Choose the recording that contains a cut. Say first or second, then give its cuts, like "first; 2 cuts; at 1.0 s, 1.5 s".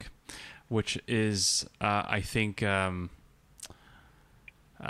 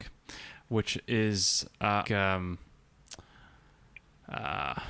second; 1 cut; at 2.0 s